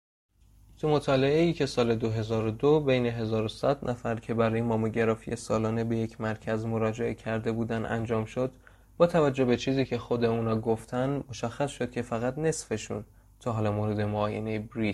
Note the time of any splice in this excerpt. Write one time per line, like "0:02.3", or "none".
none